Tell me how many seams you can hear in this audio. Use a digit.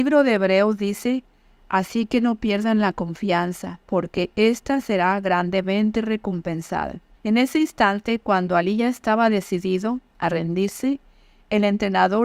1